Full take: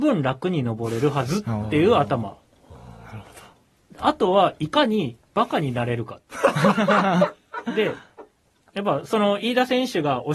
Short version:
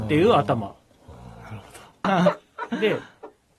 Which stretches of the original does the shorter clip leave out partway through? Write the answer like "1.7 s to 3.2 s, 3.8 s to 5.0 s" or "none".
3.7 s to 7.0 s